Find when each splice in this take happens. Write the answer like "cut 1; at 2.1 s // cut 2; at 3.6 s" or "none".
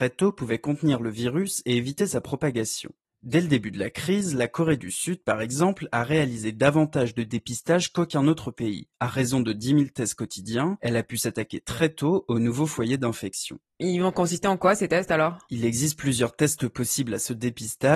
none